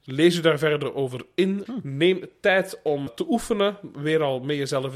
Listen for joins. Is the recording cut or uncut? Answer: cut